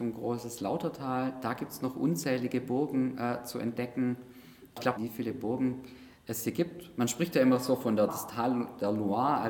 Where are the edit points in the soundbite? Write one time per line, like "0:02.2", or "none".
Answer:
0:05.0
0:08.1